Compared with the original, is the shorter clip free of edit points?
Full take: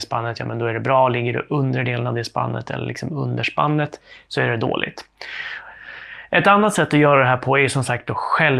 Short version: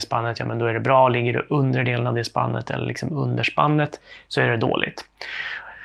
yes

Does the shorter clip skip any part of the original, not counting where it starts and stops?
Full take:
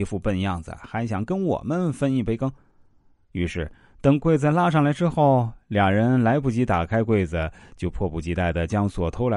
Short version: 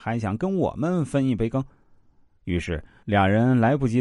yes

